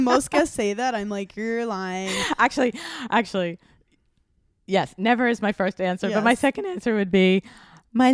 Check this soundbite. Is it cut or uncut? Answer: uncut